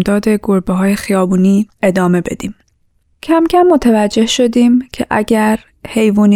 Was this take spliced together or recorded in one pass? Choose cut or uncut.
uncut